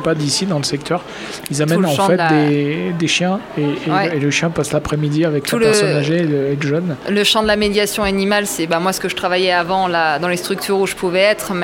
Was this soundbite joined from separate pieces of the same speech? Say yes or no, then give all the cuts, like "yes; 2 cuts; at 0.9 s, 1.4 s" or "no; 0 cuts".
no; 0 cuts